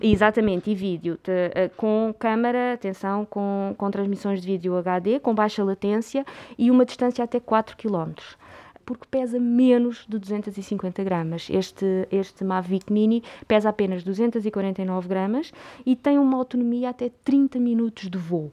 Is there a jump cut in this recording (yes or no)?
yes